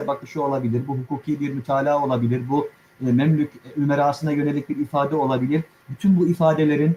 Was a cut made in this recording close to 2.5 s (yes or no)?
no